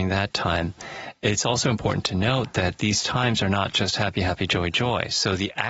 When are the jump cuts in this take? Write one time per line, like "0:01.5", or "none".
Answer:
none